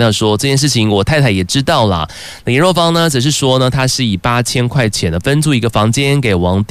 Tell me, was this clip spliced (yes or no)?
no